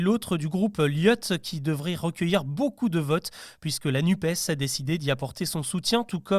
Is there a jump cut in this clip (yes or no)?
no